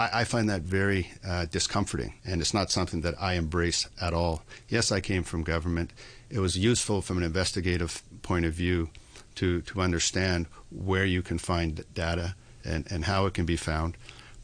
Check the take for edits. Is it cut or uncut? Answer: cut